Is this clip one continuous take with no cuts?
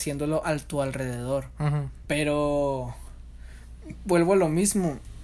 no; 1 cut; at 2.0 s

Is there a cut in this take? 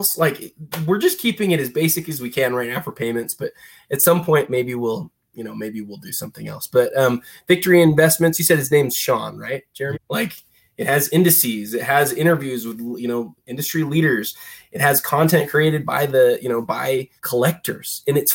yes; 2 cuts; at 9.9 s, 17.2 s

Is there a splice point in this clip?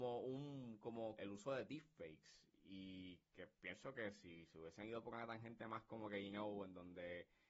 yes; 1 cut; at 1.2 s

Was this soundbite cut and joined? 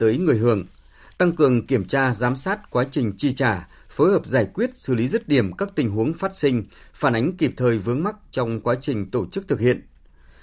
no; 0 cuts

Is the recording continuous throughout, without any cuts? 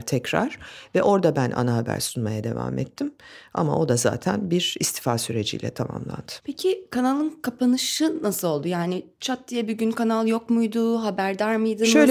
no; 1 cut; at 6.4 s

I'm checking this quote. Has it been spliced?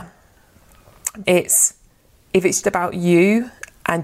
yes; 2 cuts; at 1.2 s, 2.6 s

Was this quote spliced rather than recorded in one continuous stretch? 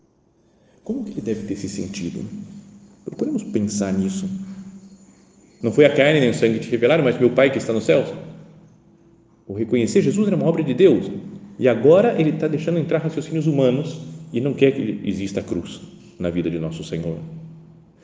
yes; 1 cut; at 5.6 s

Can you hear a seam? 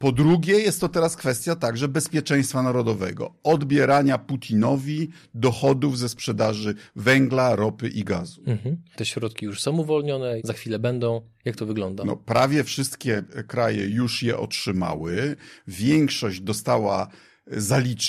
yes; 2 cuts; at 8.9 s, 10.4 s

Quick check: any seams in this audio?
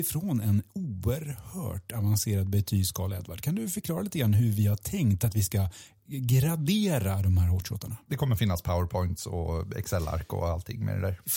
yes; 1 cut; at 8.0 s

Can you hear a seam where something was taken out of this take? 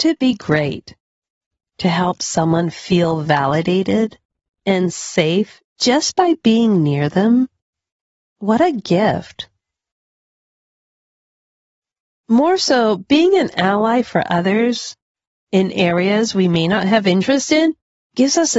no; 0 cuts

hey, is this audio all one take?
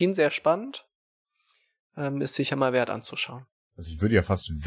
yes; 0 cuts

